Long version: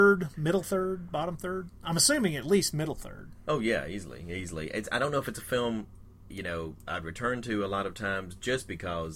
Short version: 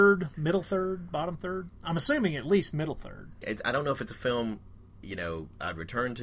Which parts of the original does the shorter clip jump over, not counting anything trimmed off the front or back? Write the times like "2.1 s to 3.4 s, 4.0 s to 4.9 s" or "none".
3.4 s to 4.7 s